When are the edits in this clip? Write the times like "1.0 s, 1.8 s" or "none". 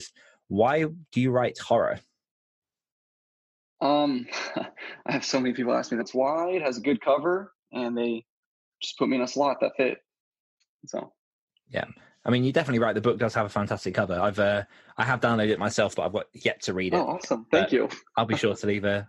6.0 s